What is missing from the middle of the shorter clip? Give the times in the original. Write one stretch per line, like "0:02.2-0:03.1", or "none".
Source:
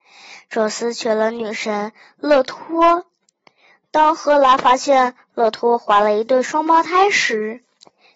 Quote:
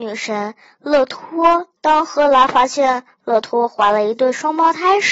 0:03.1-0:03.9